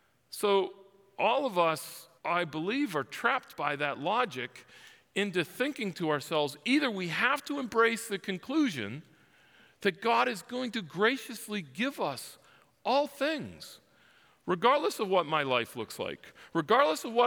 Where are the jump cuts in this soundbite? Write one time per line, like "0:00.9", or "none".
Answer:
0:02.2